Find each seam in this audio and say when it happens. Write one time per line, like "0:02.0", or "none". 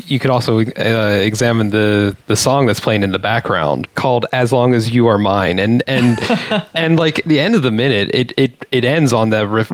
none